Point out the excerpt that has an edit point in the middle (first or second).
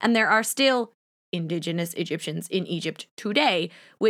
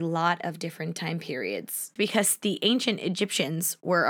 second